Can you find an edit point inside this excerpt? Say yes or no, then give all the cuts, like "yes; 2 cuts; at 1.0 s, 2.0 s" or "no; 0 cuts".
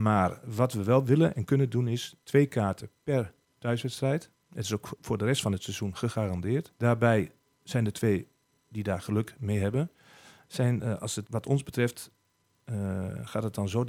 yes; 2 cuts; at 6.7 s, 11.3 s